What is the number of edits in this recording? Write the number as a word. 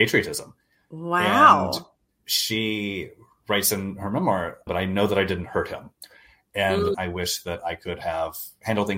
two